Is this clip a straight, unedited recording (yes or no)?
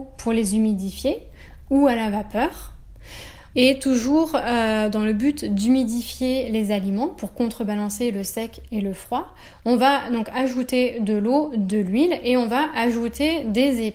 no